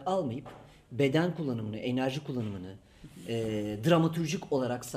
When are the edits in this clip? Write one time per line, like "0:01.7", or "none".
none